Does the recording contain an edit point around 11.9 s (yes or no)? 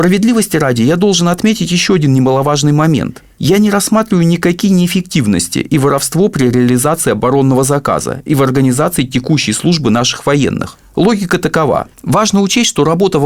yes